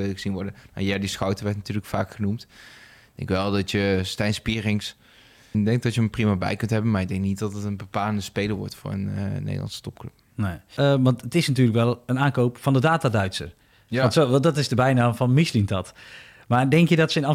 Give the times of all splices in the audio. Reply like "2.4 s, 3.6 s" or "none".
5.5 s